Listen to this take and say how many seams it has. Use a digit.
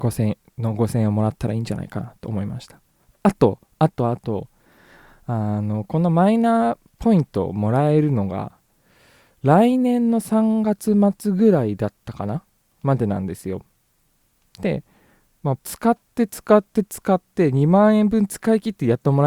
1